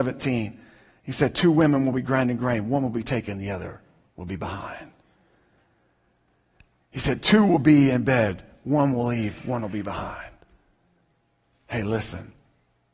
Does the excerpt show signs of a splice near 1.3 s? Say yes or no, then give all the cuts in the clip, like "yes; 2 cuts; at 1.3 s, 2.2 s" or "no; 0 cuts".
no; 0 cuts